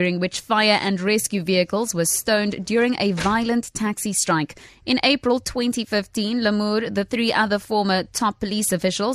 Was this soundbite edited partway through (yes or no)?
yes